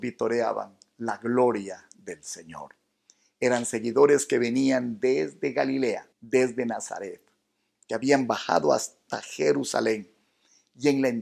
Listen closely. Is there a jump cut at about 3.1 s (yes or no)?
no